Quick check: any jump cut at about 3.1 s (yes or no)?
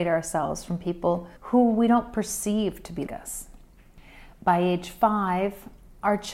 yes